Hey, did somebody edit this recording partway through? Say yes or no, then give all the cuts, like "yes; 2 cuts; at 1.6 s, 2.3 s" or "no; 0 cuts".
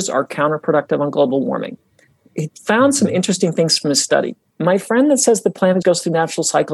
yes; 2 cuts; at 4.5 s, 5.8 s